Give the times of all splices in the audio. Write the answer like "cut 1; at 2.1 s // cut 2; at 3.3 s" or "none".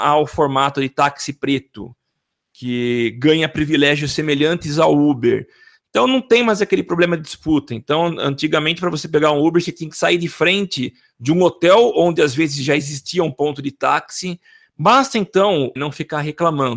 cut 1; at 14.6 s // cut 2; at 15.8 s